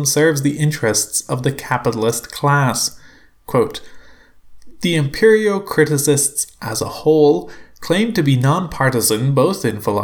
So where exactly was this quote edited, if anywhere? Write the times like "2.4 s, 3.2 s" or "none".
none